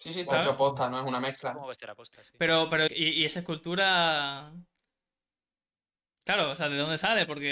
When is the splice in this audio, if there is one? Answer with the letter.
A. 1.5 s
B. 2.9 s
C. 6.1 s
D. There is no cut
B